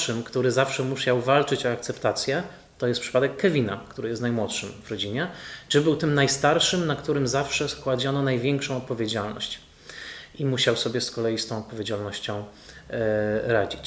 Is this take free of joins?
yes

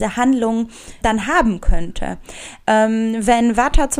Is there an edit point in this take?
yes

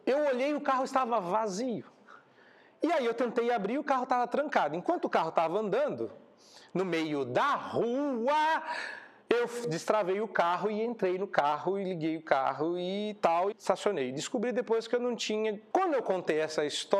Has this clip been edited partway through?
yes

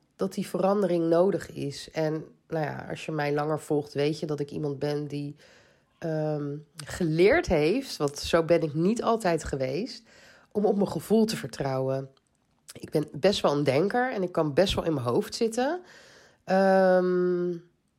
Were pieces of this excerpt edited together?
no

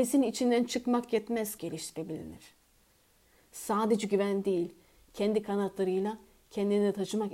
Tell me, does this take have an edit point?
yes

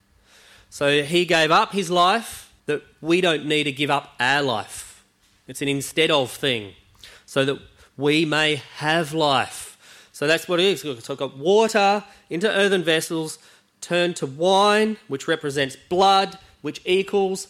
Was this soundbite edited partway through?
yes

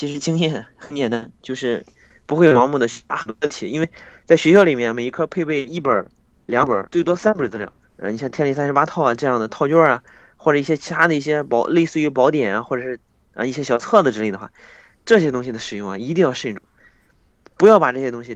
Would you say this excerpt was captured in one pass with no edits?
no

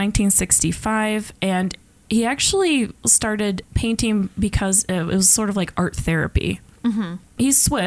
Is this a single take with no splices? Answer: yes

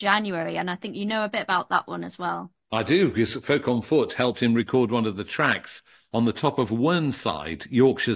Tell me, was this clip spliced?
no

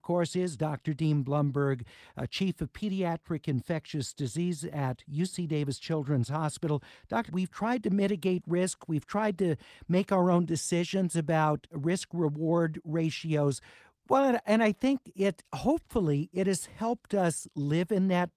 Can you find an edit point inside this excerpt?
yes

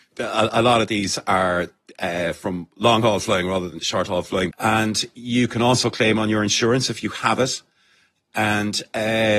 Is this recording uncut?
no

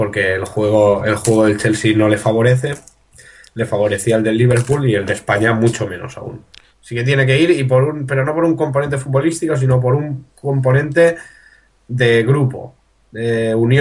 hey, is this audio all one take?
no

